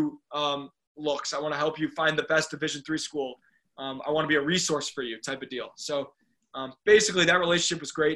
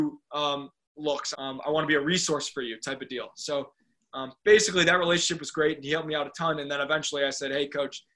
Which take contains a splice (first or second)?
second